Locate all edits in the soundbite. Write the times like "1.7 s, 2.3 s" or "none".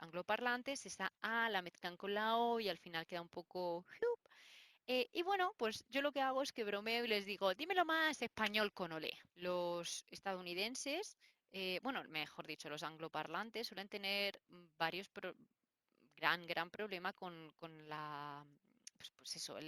9.3 s